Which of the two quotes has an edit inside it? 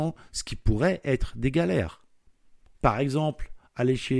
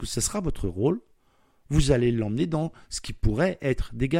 first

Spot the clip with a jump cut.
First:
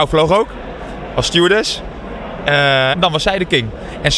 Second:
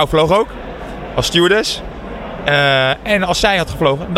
first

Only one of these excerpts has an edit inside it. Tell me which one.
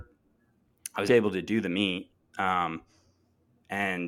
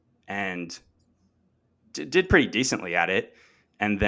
first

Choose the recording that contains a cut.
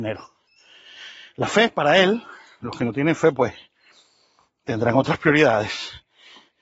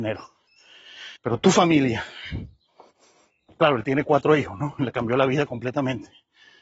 second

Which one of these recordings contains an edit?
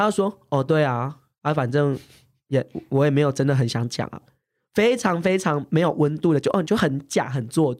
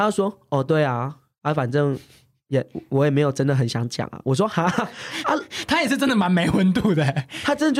first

